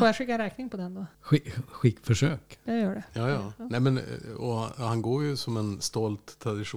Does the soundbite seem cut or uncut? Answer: cut